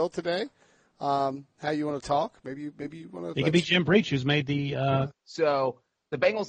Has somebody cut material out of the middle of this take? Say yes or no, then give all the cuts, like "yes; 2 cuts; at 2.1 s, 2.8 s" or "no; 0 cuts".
yes; 1 cut; at 5.1 s